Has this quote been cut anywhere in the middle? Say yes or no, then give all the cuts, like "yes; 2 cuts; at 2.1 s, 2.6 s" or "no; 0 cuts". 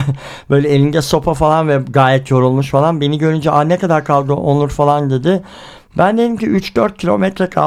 no; 0 cuts